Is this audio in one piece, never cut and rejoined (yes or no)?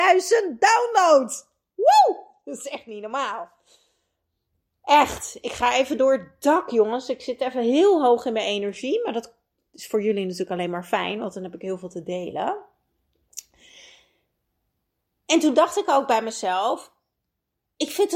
yes